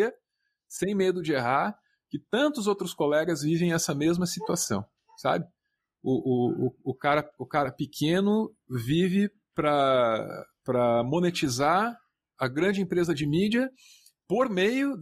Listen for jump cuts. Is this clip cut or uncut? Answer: uncut